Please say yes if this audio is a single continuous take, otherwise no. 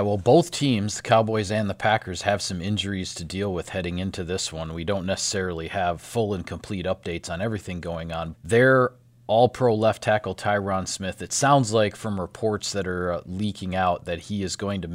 no